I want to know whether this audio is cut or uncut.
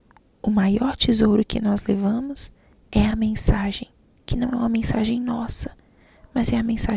uncut